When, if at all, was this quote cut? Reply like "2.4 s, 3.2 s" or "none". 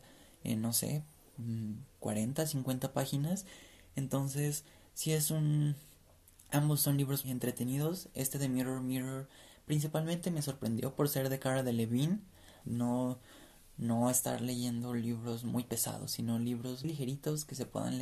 7.2 s, 12.6 s, 16.8 s